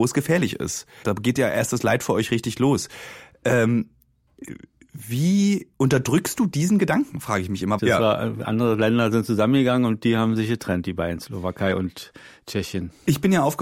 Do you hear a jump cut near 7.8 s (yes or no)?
yes